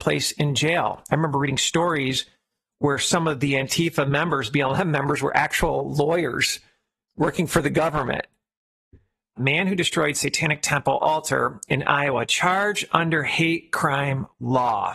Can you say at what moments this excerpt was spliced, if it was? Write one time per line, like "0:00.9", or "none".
0:09.4